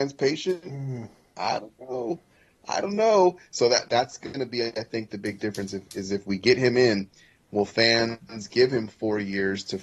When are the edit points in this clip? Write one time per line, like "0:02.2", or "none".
0:03.8